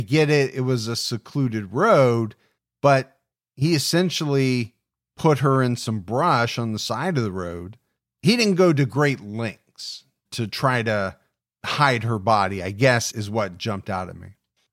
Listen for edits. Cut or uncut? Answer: cut